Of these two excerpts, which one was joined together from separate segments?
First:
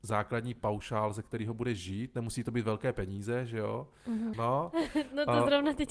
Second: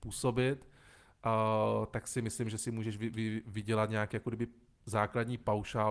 first; 1 cut; at 4.3 s

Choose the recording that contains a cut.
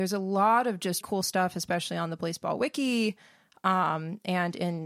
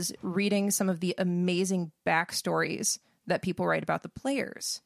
first; 1 cut; at 1.0 s

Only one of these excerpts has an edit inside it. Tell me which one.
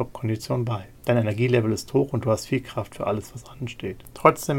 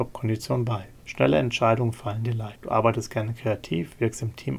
second; 1 cut; at 1.0 s

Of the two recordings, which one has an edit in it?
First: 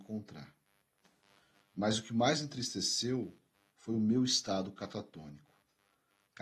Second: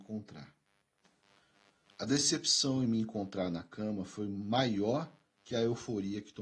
first; 1 cut; at 1.6 s

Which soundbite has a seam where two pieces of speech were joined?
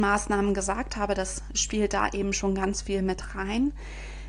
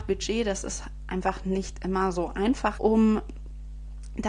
second; 1 cut; at 2.8 s

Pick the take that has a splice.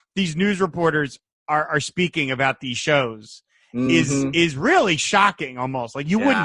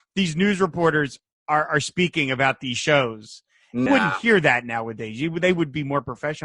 second; 1 cut; at 3.9 s

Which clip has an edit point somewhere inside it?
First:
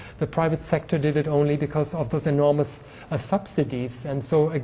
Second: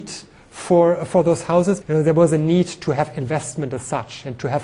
second; 1 cut; at 1.8 s

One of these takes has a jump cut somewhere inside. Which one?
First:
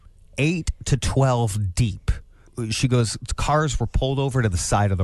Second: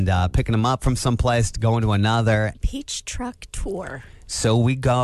second; 1 cut; at 2.5 s

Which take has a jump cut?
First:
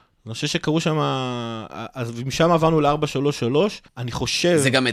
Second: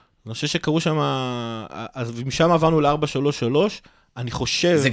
first; 1 cut; at 3.9 s

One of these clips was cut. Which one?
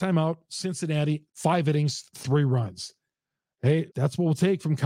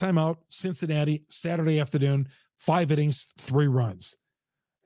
first; 2 cuts; at 1.3 s, 3.9 s

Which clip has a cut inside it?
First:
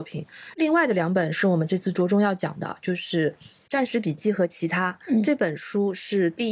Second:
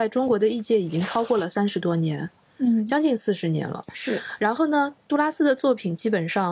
second; 1 cut; at 3.9 s

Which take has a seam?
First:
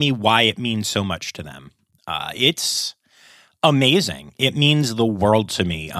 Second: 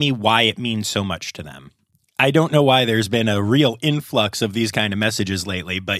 first; 1 cut; at 2.0 s

